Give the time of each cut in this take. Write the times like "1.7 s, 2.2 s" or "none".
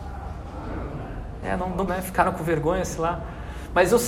1.9 s